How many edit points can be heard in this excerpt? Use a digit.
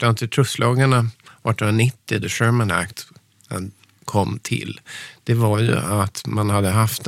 0